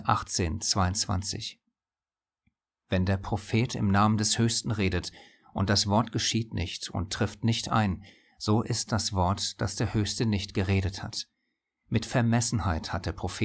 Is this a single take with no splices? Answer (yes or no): no